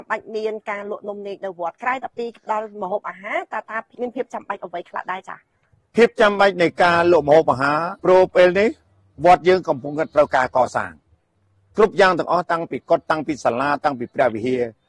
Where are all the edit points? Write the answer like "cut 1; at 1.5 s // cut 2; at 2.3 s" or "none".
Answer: cut 1; at 3.9 s // cut 2; at 8.0 s